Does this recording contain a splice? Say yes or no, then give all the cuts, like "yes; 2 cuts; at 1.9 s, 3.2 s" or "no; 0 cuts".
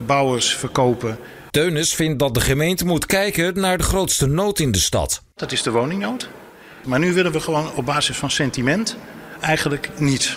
yes; 2 cuts; at 1.5 s, 6.8 s